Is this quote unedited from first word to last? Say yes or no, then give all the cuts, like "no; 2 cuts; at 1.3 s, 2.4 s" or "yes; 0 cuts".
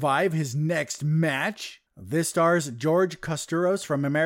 no; 1 cut; at 1.9 s